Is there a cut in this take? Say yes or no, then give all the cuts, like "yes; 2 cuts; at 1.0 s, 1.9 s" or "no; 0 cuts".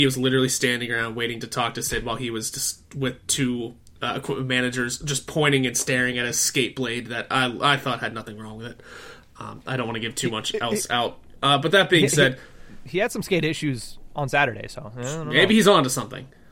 no; 0 cuts